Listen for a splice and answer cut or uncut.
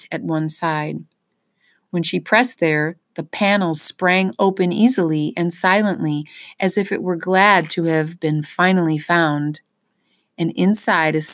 uncut